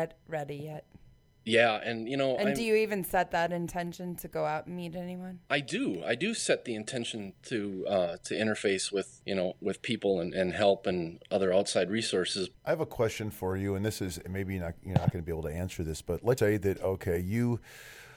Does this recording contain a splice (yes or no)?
yes